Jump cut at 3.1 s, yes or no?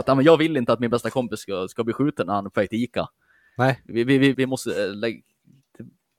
no